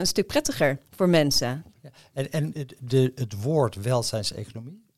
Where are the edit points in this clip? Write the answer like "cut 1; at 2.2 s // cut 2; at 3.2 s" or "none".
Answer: cut 1; at 1.7 s